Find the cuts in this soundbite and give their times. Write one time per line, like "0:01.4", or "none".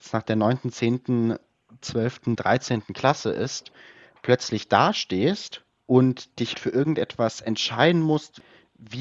0:06.5